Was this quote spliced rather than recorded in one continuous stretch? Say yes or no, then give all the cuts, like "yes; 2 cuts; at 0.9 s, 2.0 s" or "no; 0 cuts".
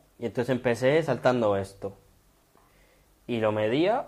no; 0 cuts